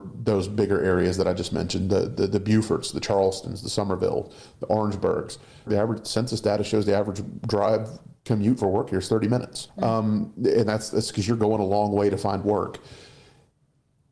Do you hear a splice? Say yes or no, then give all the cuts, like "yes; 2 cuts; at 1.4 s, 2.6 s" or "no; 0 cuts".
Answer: yes; 2 cuts; at 5.7 s, 9.7 s